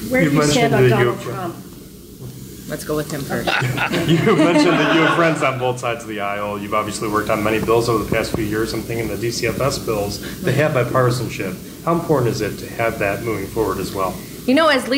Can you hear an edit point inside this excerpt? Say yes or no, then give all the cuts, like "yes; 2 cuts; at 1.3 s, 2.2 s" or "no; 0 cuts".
no; 0 cuts